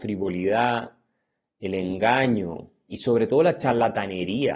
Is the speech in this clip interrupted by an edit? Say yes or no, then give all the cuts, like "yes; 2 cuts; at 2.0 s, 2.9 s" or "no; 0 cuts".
yes; 1 cut; at 2.9 s